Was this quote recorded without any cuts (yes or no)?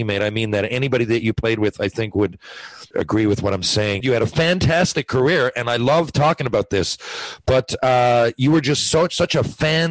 no